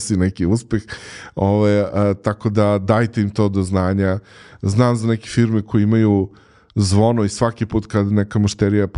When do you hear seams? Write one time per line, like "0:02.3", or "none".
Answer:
none